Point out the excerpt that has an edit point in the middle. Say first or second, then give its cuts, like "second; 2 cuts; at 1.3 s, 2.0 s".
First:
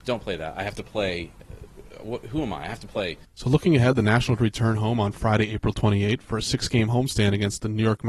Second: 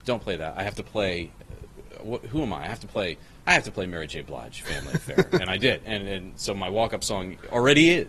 first; 1 cut; at 3.2 s